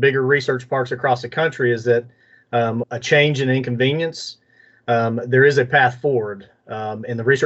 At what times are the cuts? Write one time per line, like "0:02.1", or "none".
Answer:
0:02.8